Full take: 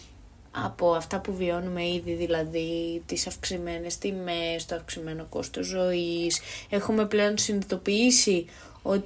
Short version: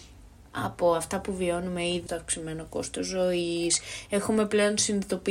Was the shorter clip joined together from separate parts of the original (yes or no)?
yes